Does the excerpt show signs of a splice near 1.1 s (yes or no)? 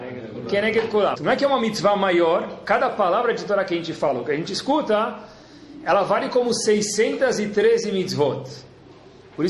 yes